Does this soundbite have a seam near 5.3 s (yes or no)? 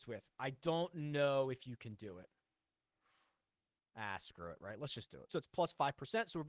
yes